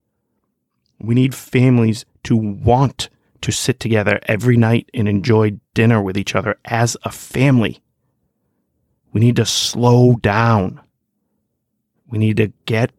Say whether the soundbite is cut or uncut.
uncut